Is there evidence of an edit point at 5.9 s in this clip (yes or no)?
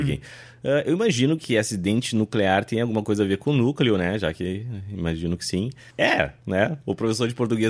yes